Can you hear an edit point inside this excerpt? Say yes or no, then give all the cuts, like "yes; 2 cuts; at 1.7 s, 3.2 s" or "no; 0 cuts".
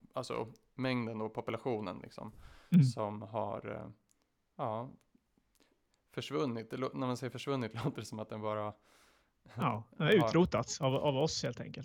no; 0 cuts